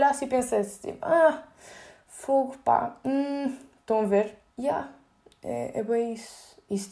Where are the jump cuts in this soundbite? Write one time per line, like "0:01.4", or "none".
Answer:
0:04.5